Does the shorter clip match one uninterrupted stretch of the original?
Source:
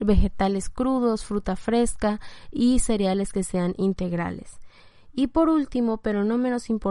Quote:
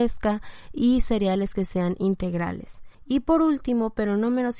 no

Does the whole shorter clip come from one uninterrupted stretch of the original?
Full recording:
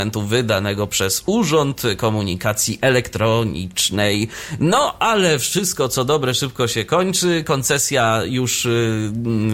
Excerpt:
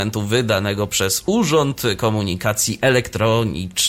yes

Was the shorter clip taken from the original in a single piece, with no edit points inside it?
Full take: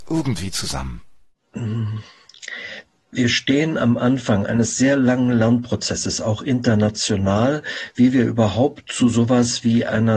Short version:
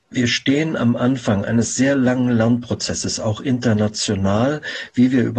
yes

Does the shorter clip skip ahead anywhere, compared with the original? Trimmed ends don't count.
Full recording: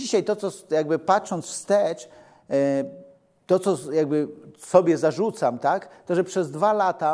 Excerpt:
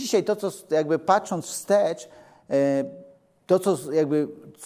no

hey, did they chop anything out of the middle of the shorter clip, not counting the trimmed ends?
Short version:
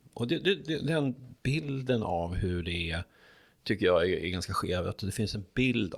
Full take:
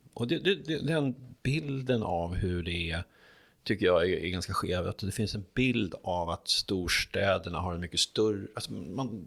no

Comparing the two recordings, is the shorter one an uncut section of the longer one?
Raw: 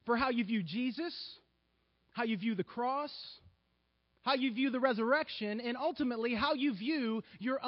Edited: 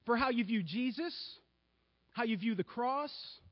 yes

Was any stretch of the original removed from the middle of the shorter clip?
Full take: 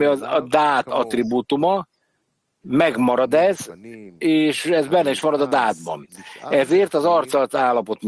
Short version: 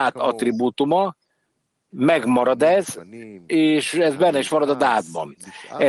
no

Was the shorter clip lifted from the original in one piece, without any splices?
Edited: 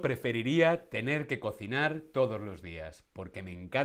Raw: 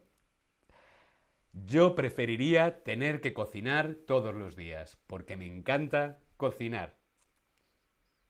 yes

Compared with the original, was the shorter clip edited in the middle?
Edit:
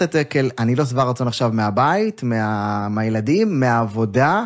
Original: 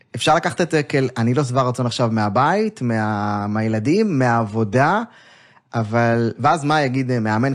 no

